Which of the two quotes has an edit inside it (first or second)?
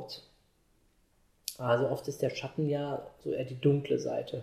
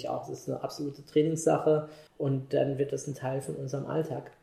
second